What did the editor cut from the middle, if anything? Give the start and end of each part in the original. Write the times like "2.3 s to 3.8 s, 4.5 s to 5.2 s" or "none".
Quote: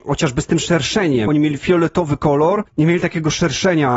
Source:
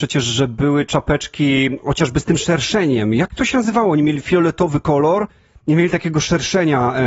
3.1 s to 3.9 s, 5.3 s to 5.6 s